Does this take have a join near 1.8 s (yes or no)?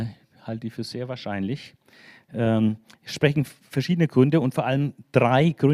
no